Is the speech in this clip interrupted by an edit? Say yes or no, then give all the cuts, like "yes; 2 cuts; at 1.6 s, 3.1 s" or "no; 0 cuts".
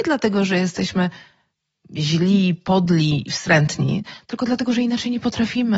no; 0 cuts